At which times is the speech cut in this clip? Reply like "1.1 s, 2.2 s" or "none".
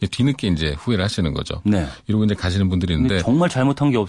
1.6 s